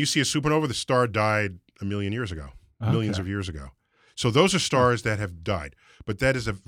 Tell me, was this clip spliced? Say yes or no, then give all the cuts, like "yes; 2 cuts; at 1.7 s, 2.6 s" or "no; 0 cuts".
no; 0 cuts